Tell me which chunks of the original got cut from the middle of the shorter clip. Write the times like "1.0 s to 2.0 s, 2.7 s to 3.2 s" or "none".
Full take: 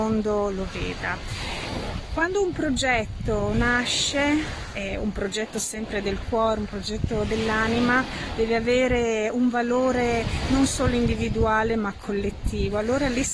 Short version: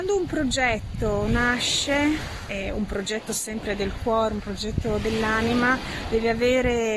none

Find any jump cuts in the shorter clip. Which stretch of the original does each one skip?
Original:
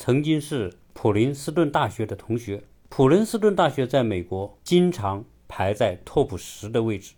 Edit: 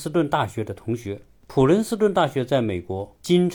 none

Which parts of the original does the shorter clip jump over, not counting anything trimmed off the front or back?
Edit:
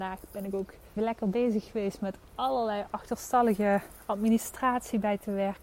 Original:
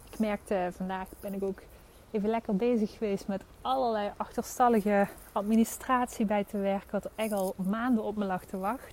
1.9 s to 2.2 s

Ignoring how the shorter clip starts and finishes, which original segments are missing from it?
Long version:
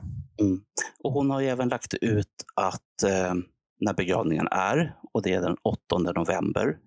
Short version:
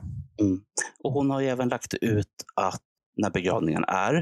3.0 s to 3.6 s

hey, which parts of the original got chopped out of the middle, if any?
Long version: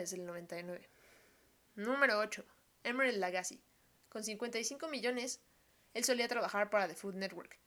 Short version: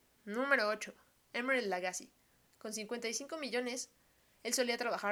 none

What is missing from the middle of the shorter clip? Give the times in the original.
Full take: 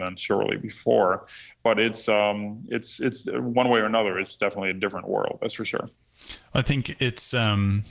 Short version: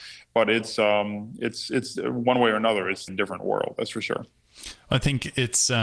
4.4 s to 4.7 s

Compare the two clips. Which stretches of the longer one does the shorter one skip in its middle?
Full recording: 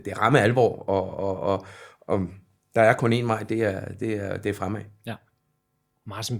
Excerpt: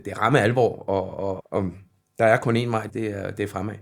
1.4 s to 2.0 s, 3.4 s to 3.9 s

